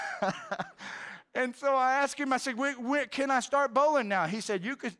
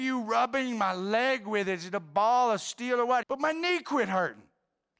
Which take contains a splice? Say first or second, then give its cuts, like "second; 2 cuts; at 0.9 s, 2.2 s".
second; 1 cut; at 3.2 s